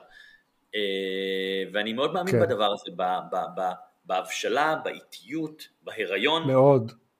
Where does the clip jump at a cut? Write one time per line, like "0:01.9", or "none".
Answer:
none